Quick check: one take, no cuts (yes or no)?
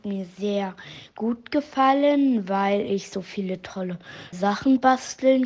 no